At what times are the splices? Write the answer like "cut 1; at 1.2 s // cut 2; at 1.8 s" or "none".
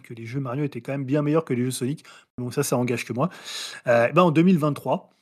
none